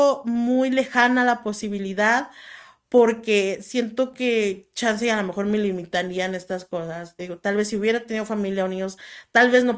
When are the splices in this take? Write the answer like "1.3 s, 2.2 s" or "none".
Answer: 7.2 s